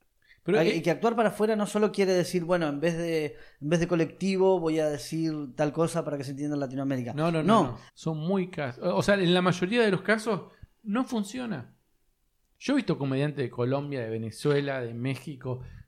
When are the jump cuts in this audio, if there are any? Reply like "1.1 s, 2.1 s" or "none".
7.9 s